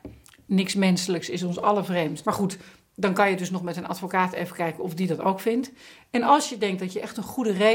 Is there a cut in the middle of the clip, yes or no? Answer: yes